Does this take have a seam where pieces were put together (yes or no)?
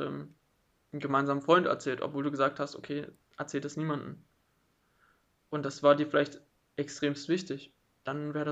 no